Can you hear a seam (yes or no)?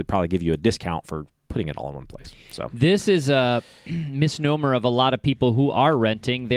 no